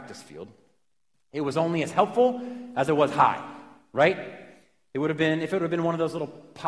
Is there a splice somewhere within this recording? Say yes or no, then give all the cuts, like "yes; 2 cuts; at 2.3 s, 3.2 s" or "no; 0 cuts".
no; 0 cuts